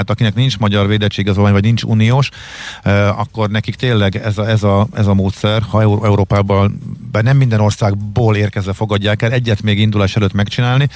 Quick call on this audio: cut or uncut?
uncut